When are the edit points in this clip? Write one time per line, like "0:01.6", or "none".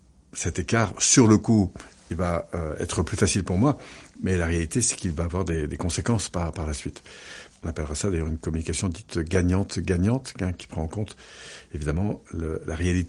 0:07.5